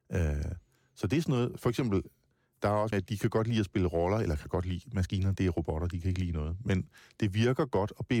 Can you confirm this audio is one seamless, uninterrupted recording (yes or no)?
no